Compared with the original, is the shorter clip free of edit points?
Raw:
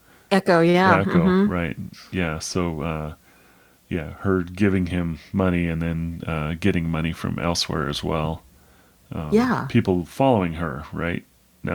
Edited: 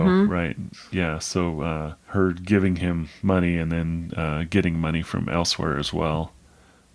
no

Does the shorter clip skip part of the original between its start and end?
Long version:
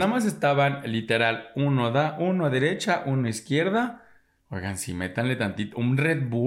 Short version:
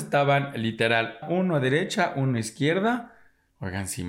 yes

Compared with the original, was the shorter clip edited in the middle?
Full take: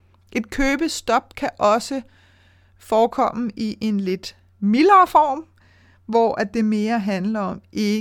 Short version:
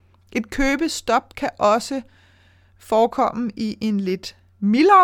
no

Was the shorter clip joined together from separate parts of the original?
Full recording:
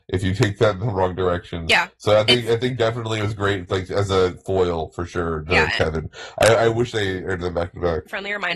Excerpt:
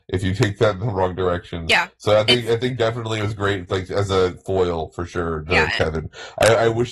no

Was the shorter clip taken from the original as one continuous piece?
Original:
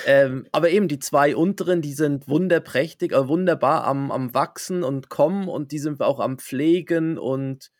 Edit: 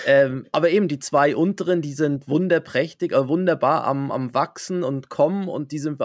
yes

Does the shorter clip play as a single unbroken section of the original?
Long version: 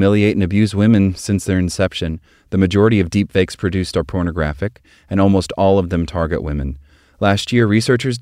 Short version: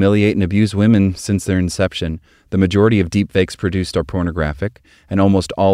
yes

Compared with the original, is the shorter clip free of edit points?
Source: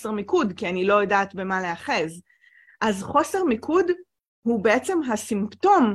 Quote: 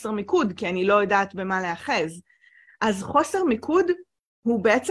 yes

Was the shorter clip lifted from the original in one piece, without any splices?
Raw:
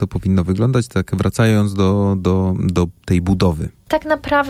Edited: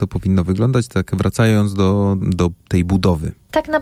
no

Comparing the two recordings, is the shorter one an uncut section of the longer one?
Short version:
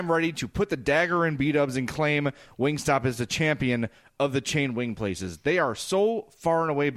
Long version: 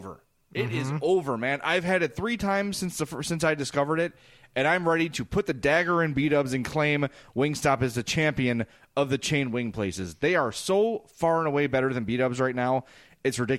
yes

